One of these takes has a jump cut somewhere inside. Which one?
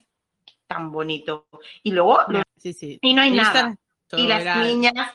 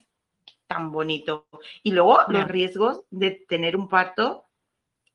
first; 2 cuts; at 2.4 s, 4.1 s

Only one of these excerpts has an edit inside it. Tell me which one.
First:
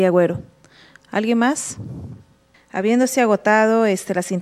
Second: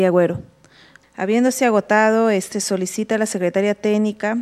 second; 2 cuts; at 1.0 s, 2.5 s

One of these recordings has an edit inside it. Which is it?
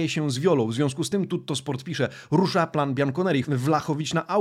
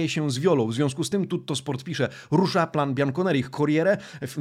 first; 1 cut; at 3.4 s

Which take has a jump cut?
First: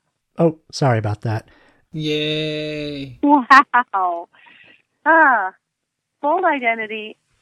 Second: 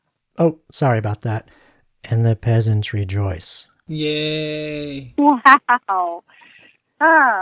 first; 1 cut; at 1.9 s

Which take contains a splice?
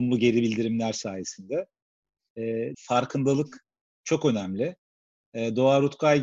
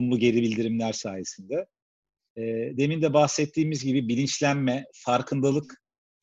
first; 1 cut; at 2.7 s

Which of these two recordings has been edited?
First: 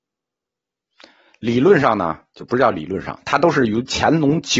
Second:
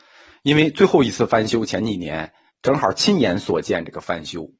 second; 1 cut; at 2.5 s

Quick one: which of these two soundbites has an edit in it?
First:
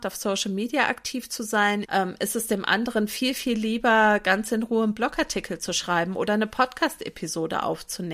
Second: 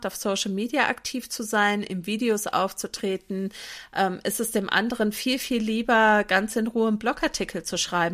first; 1 cut; at 1.8 s

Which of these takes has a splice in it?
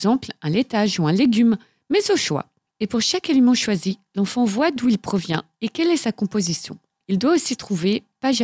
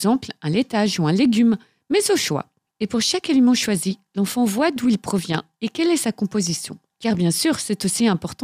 second; 1 cut; at 6.9 s

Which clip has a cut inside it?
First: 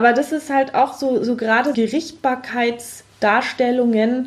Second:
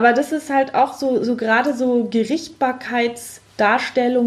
first; 1 cut; at 1.7 s

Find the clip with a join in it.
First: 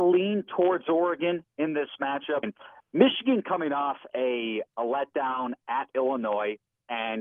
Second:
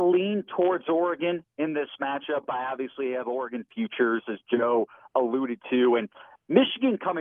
first; 1 cut; at 2.4 s

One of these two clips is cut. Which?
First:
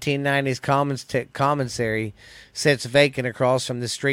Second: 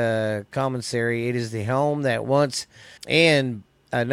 second; 1 cut; at 3.0 s

